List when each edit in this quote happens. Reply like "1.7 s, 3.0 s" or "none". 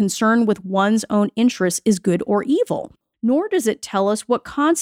none